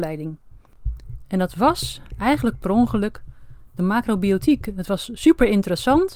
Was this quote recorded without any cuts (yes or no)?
yes